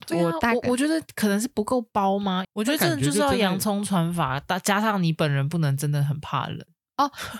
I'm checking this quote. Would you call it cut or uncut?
cut